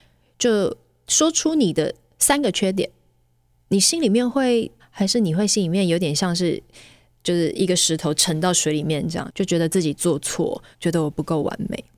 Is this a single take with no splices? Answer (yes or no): no